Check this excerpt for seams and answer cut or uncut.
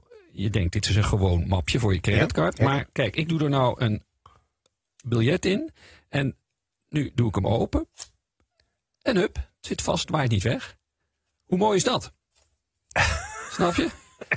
uncut